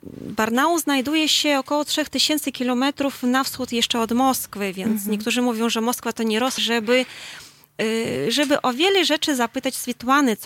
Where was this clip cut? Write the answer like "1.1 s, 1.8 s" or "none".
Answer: 6.6 s